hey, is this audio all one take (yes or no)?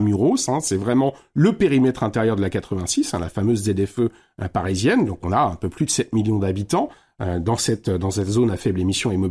yes